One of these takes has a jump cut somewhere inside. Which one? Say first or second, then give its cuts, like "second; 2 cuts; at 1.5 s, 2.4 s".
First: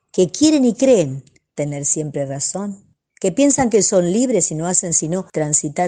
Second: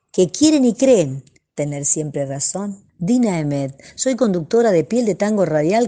second; 1 cut; at 2.9 s